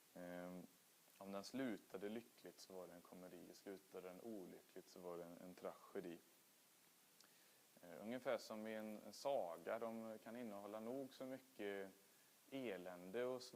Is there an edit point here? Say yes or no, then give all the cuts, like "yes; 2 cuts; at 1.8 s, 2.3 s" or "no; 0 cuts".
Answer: no; 0 cuts